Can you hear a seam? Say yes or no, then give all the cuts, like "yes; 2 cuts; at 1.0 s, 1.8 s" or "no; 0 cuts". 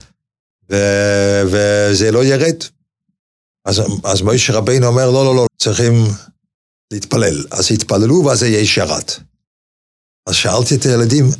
yes; 1 cut; at 5.5 s